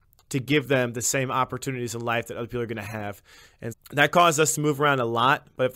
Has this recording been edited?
yes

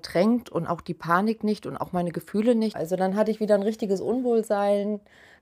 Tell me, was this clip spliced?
yes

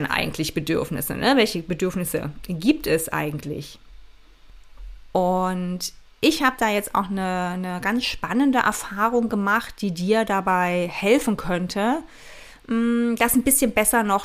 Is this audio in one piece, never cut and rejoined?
yes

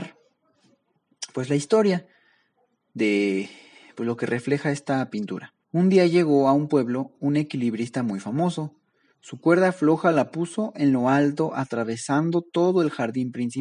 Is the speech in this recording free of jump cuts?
no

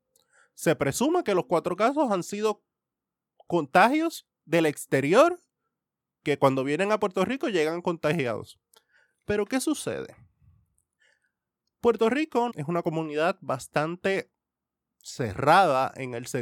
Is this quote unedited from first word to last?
no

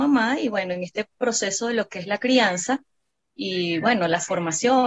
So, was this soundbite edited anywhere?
no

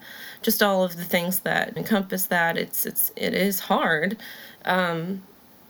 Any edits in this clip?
yes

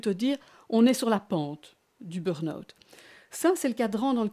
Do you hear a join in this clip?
no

